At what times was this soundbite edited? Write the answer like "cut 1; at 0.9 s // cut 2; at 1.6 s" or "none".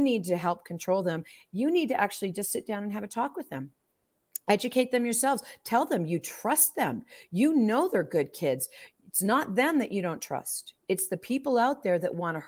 none